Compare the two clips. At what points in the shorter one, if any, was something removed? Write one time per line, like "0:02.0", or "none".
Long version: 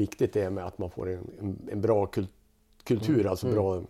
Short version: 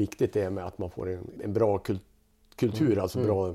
0:01.4